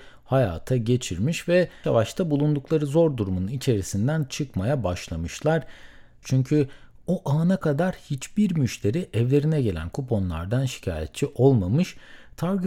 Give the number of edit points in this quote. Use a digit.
2